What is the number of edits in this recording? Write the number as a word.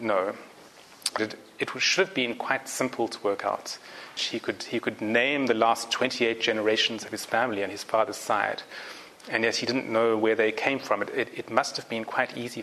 two